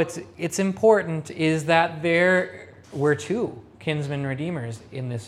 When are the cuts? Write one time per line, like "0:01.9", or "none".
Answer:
0:02.8